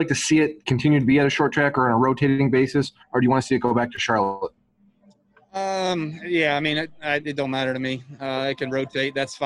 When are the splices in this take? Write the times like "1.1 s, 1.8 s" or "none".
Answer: none